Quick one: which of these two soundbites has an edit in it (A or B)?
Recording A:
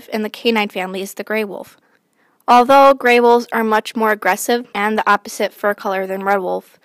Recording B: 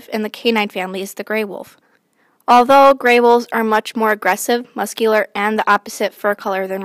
A